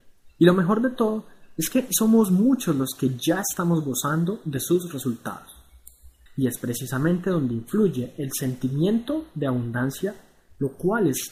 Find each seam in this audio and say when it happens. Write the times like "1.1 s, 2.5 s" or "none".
6.3 s